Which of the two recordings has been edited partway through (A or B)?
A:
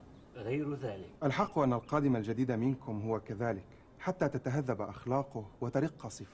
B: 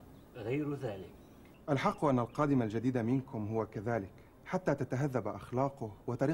A